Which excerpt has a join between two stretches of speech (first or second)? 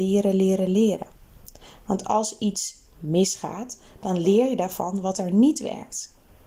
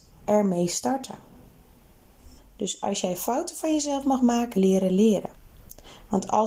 second